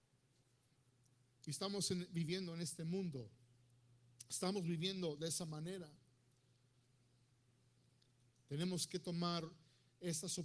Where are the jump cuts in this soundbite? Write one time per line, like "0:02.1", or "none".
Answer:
none